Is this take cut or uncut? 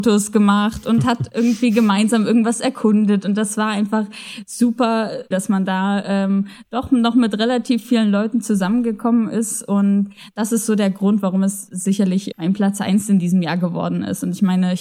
cut